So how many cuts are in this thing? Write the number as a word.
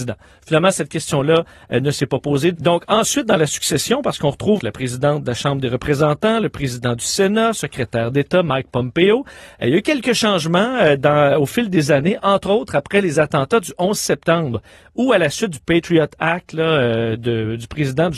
three